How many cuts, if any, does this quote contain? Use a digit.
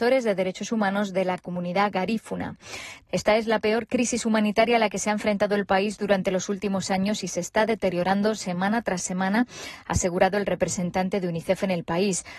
1